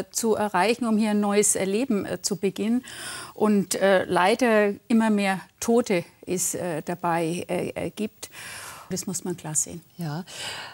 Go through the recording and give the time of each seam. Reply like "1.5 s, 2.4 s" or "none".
8.9 s